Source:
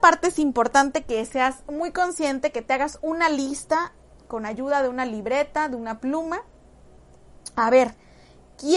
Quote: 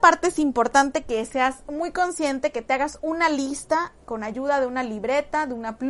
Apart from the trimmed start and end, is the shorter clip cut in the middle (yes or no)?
yes